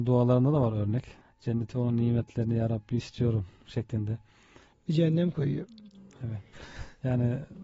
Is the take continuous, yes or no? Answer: no